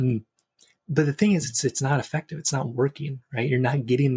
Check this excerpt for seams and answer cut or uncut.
uncut